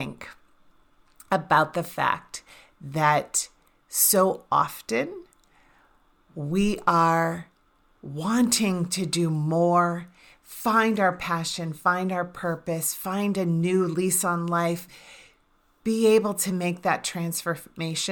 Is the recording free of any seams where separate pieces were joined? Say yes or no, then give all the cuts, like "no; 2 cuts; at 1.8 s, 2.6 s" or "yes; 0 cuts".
yes; 0 cuts